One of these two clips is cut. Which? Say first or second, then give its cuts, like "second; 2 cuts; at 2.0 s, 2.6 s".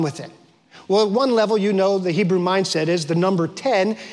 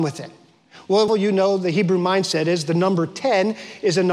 second; 1 cut; at 1.1 s